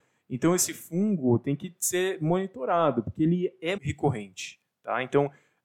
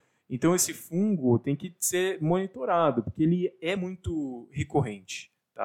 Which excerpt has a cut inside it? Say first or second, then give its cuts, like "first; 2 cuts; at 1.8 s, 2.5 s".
first; 1 cut; at 3.8 s